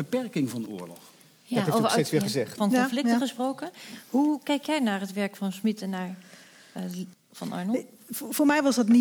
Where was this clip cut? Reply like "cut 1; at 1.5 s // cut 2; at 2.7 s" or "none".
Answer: cut 1; at 2.6 s // cut 2; at 7.1 s